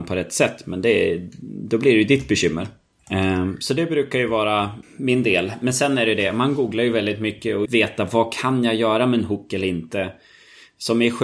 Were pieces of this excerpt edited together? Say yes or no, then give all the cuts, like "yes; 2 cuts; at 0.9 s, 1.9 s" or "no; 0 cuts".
yes; 3 cuts; at 3.0 s, 4.8 s, 7.7 s